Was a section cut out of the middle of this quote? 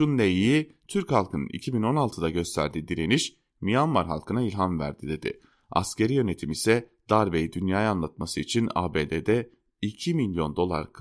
no; 0 cuts

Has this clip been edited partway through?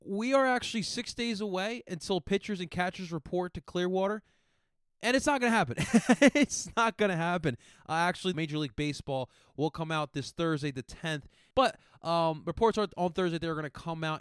yes; 2 cuts; at 8.3 s, 11.5 s

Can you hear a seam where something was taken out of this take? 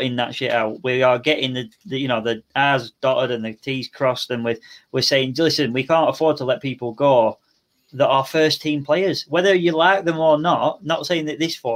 no; 0 cuts

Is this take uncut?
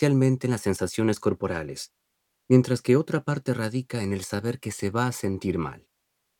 yes; 0 cuts

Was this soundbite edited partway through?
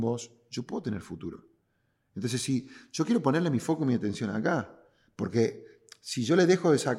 no; 0 cuts

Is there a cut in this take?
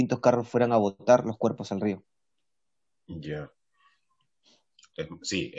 no; 0 cuts

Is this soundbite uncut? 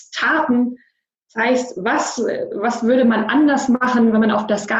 yes; 0 cuts

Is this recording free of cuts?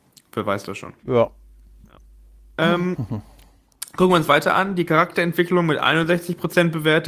no; 1 cut; at 1.0 s

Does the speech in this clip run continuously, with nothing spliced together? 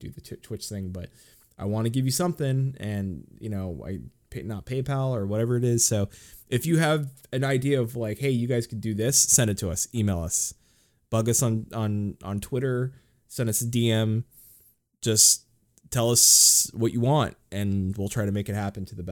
yes; 0 cuts

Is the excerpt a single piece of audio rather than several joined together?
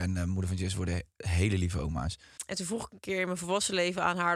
no; 1 cut; at 2.4 s

